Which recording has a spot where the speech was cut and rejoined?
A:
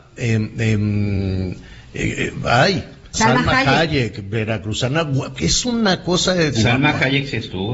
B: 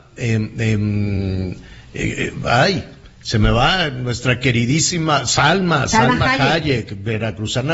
A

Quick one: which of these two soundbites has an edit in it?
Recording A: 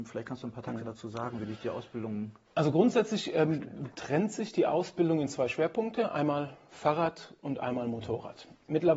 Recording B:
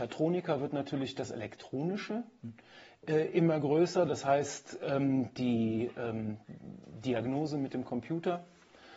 A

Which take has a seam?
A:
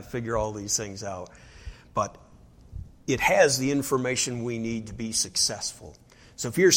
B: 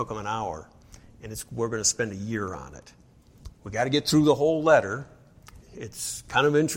B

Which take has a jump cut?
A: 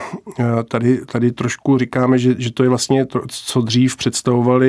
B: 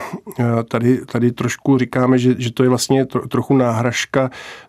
A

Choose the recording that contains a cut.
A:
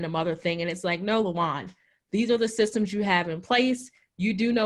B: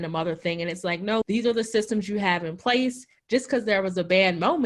B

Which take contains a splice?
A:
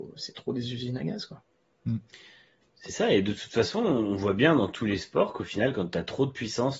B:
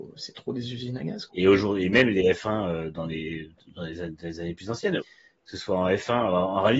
B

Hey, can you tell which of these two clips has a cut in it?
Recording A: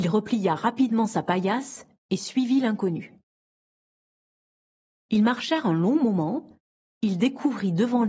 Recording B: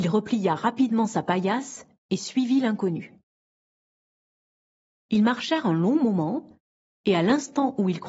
A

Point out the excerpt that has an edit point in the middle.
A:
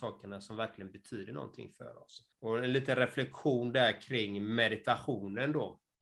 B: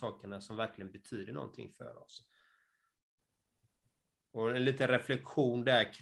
A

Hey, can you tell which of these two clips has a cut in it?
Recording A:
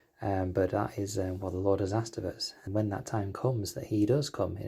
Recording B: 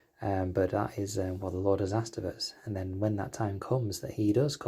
A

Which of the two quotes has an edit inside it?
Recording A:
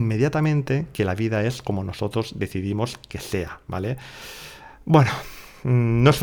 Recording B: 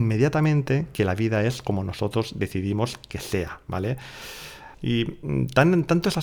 B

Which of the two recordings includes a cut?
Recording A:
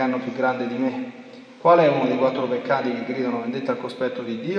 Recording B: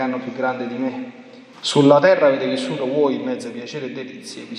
B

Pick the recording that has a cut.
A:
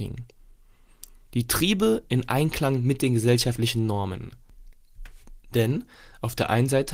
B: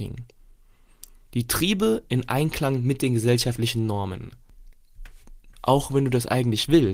B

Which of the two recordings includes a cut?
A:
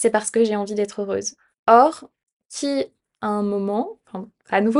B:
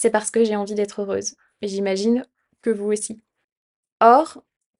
A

